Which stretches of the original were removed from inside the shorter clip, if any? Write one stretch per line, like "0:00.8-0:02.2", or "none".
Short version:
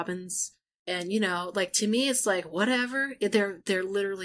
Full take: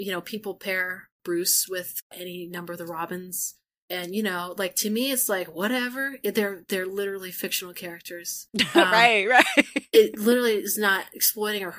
none